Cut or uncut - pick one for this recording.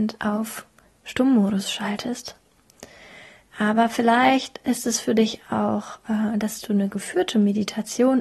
uncut